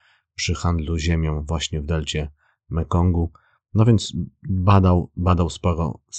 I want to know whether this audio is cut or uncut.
uncut